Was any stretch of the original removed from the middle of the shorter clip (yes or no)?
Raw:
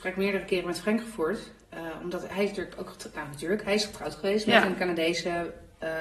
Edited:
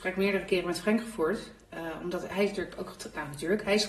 no